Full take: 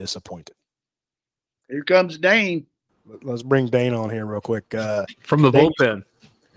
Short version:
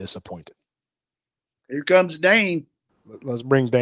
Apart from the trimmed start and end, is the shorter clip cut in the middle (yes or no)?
no